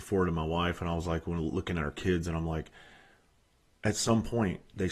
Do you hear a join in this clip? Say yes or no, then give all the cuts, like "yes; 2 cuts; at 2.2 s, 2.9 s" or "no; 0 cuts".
no; 0 cuts